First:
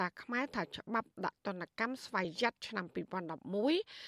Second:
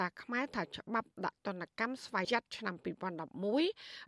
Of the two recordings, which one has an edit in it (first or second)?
second